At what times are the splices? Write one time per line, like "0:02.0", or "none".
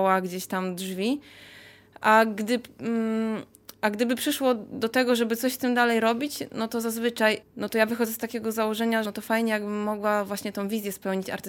0:07.4
0:09.0